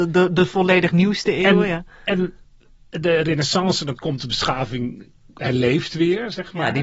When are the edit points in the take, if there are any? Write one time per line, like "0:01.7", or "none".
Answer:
0:04.0